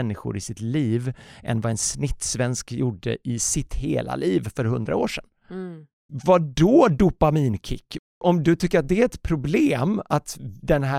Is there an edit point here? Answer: yes; 2 cuts; at 5.9 s, 8.1 s

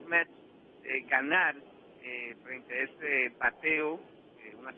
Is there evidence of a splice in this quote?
no; 0 cuts

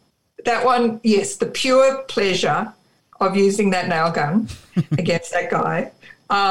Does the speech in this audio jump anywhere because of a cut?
no; 0 cuts

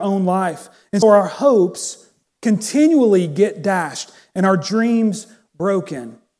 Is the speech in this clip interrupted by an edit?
yes; 1 cut; at 1.0 s

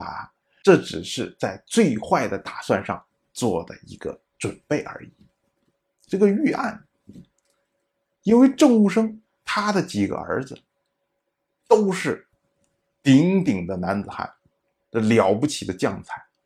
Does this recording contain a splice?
no; 0 cuts

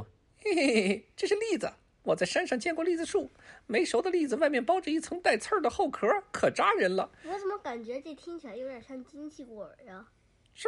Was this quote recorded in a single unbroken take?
yes; 0 cuts

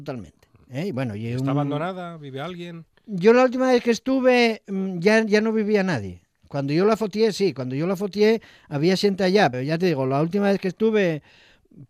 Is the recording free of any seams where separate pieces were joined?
no; 1 cut; at 9.5 s

